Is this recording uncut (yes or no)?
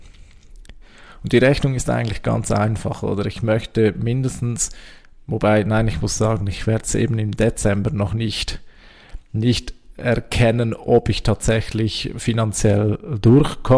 yes